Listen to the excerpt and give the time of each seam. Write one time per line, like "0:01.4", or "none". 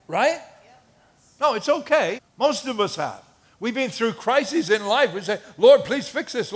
0:02.2